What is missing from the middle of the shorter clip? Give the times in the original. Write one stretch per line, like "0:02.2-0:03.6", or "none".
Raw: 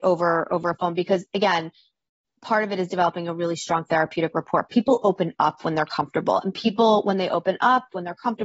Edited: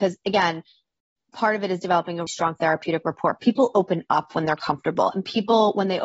0:03.4-0:03.6